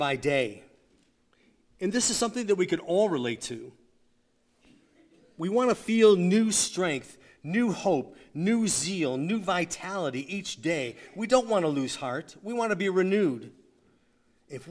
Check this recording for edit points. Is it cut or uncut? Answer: uncut